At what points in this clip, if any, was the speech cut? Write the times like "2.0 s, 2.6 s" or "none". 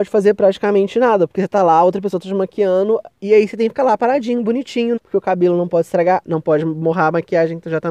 3.1 s, 5.0 s, 6.2 s